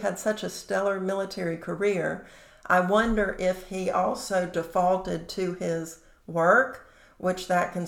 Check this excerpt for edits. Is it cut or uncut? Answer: uncut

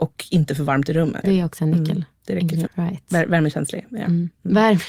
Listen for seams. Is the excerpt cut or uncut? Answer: cut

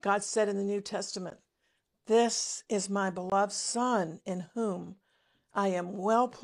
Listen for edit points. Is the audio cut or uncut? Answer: uncut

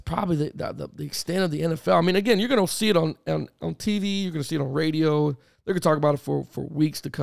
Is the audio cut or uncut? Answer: uncut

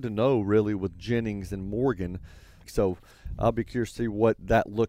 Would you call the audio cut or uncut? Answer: cut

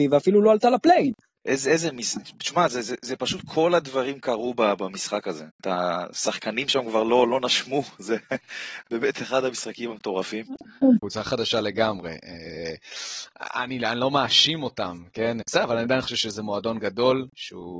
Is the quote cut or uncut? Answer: cut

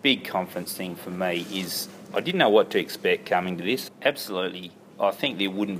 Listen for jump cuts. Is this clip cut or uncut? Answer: cut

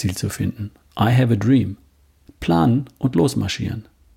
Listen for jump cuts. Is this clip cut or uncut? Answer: cut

